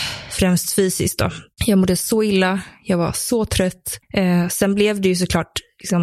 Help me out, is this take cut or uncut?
uncut